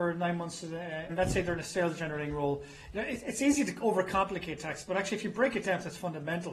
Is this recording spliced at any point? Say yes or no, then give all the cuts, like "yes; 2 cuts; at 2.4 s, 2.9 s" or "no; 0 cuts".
yes; 1 cut; at 1.1 s